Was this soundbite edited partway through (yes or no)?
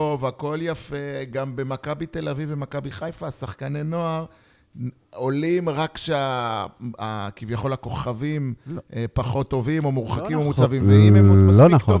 no